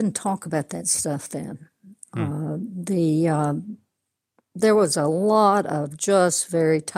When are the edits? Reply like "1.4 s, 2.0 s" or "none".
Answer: none